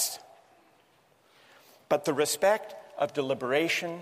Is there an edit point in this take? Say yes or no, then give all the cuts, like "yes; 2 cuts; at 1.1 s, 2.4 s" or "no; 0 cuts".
no; 0 cuts